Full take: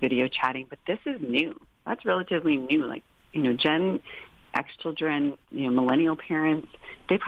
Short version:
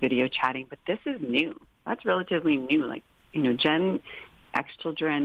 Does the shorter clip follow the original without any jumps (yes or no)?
yes